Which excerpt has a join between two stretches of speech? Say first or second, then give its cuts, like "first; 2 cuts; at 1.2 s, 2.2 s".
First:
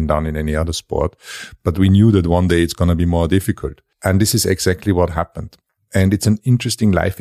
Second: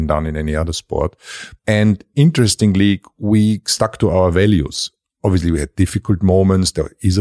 second; 1 cut; at 1.6 s